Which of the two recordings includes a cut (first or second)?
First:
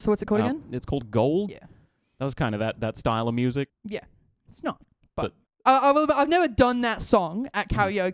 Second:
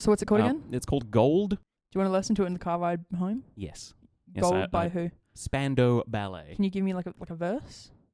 first